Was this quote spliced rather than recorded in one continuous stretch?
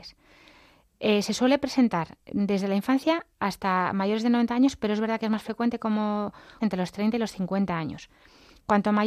yes; 1 cut; at 6.6 s

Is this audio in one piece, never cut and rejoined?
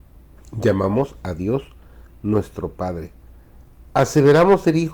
yes; 0 cuts

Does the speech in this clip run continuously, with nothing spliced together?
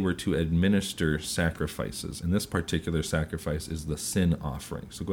yes; 0 cuts

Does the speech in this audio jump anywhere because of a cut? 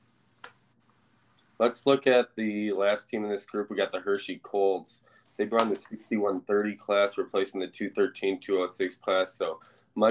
no; 0 cuts

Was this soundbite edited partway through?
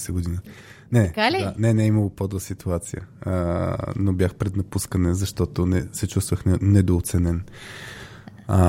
no; 0 cuts

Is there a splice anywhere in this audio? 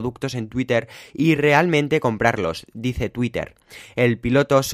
no; 0 cuts

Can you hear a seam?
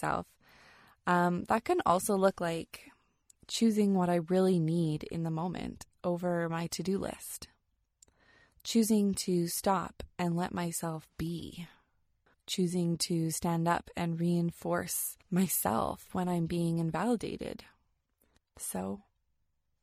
yes; 3 cuts; at 12.3 s, 15.2 s, 18.4 s

